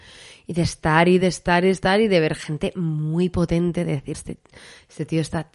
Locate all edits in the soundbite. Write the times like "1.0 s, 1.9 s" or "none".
4.1 s